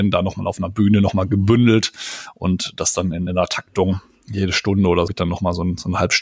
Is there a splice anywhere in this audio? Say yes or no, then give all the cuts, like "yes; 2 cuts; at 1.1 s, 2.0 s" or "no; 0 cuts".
yes; 2 cuts; at 3.3 s, 5.1 s